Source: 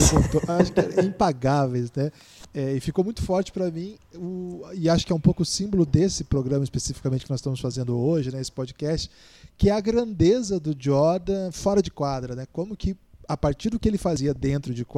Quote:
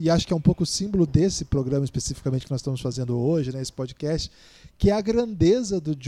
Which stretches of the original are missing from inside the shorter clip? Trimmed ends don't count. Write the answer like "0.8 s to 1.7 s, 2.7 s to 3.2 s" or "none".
none